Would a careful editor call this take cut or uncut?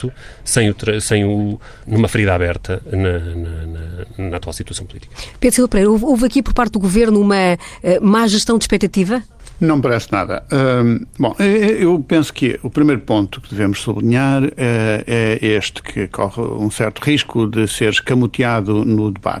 cut